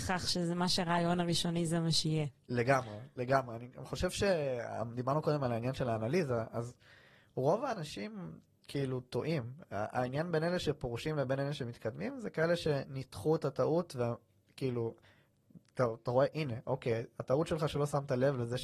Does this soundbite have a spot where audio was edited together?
no; 0 cuts

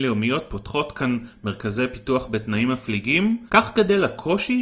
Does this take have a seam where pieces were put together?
no; 0 cuts

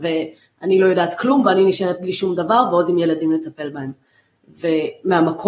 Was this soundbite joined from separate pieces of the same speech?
no; 0 cuts

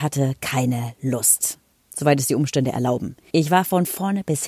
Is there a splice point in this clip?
yes; 2 cuts; at 1.7 s, 3.3 s

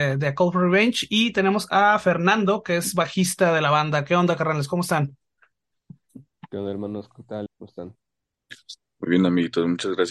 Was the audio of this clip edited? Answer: yes; 1 cut; at 7.5 s

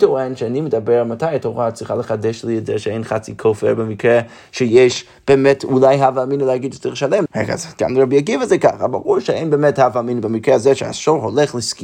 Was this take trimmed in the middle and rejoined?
yes; 1 cut; at 7.3 s

